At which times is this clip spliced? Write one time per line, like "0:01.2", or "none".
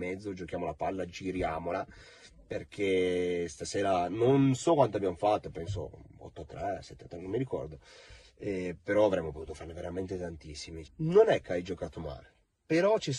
0:10.8